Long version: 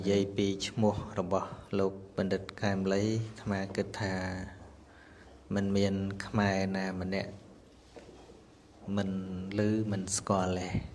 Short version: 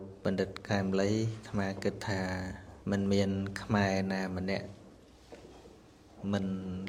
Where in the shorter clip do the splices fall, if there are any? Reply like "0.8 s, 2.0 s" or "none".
2.8 s